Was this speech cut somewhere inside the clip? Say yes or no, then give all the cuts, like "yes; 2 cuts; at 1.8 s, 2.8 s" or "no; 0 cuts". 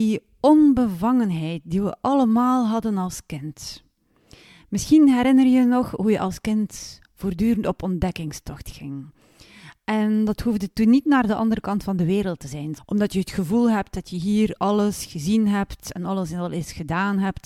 yes; 1 cut; at 12.8 s